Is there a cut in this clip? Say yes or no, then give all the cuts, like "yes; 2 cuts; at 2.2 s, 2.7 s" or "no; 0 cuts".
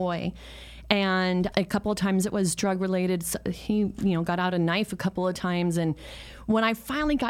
yes; 1 cut; at 1.5 s